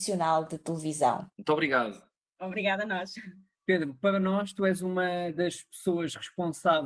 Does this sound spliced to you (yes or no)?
yes